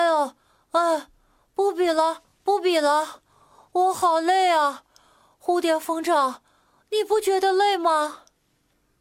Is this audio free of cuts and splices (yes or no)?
yes